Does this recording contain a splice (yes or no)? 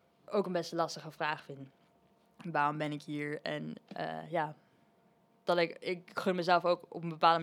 no